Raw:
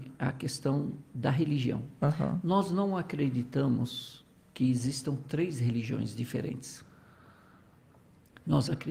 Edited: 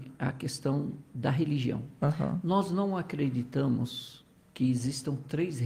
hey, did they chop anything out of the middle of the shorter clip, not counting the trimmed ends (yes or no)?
no